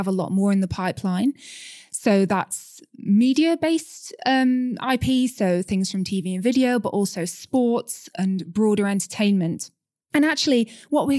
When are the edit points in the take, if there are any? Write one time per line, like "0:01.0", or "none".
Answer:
none